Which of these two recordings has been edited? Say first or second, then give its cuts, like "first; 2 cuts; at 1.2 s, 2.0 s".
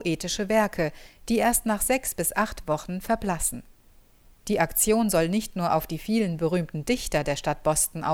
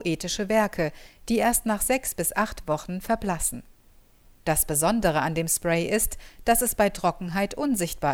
second; 1 cut; at 4.3 s